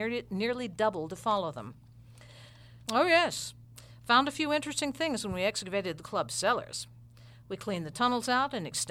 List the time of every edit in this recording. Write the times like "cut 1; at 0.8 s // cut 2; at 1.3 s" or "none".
cut 1; at 2.9 s